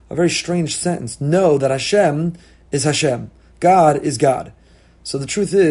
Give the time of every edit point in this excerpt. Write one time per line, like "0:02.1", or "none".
none